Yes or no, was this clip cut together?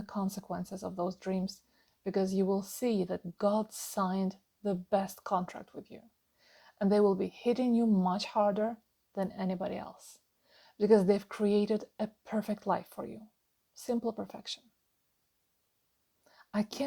no